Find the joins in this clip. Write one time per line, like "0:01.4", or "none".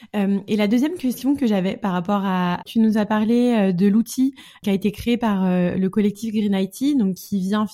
0:02.6